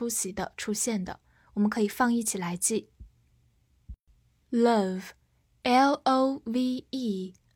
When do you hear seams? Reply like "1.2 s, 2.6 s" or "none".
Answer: none

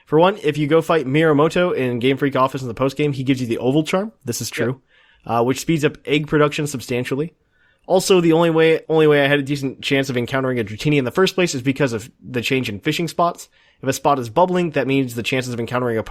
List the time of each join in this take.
8.9 s

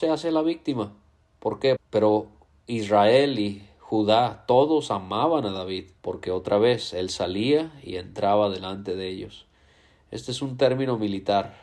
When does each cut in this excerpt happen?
1.8 s, 6.0 s

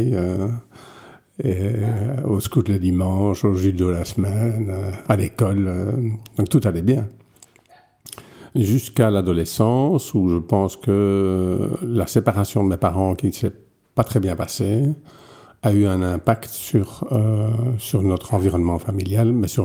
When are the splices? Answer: none

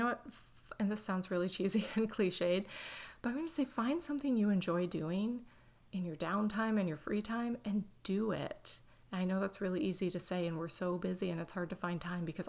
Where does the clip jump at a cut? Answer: none

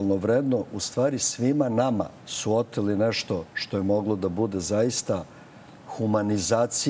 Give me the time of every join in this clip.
2.2 s

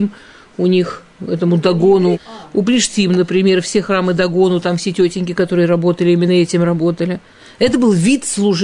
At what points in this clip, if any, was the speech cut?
2.1 s

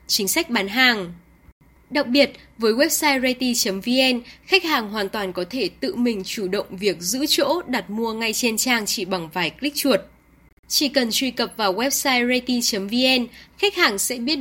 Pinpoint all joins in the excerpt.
10.5 s

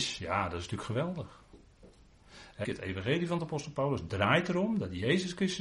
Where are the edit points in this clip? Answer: 2.6 s

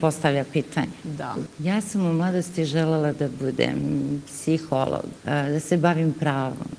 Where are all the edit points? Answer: 1.5 s, 5.2 s

